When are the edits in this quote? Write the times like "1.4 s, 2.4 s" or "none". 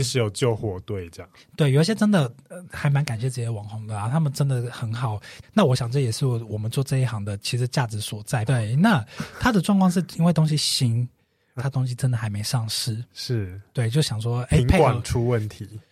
5.4 s, 8.5 s, 11.6 s